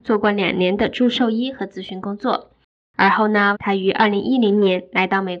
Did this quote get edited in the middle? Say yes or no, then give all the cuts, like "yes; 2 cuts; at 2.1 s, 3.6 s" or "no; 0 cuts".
yes; 1 cut; at 3.5 s